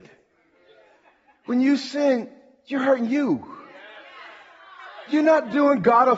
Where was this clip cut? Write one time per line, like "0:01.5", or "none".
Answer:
none